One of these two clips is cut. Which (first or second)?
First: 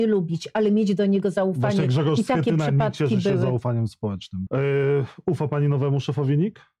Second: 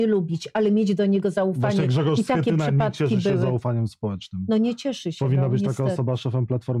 first